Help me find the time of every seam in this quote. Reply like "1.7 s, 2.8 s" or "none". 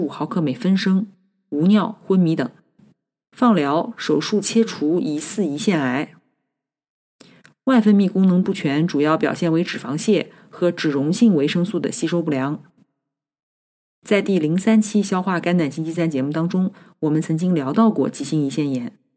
3.2 s